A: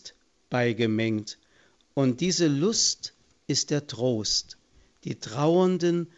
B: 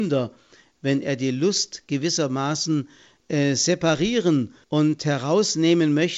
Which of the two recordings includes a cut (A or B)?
B